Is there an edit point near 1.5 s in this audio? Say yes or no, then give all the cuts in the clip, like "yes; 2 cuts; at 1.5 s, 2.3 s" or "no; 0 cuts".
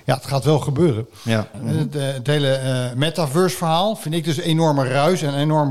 yes; 1 cut; at 1.5 s